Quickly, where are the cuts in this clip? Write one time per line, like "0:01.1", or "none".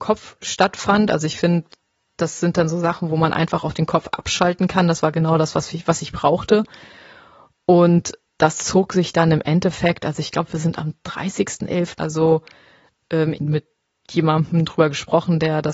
0:12.0
0:13.3